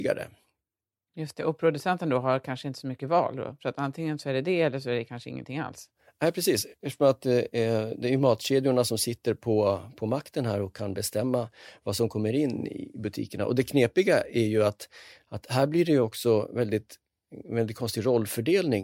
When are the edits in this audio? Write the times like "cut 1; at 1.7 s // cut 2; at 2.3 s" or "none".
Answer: none